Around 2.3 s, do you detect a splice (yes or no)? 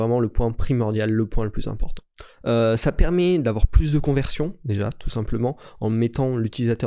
yes